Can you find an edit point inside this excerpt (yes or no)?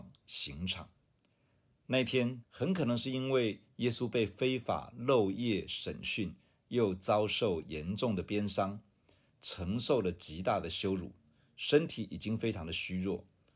yes